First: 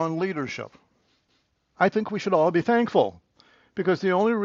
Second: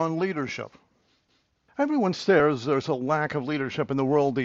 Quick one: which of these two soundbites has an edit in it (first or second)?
first